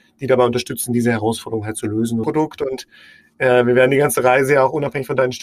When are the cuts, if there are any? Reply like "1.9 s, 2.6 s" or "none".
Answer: 2.2 s